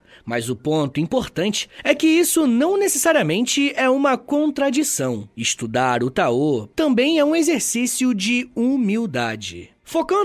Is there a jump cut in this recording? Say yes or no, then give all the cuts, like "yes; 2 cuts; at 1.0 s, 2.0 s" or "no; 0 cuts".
yes; 2 cuts; at 5.3 s, 6.7 s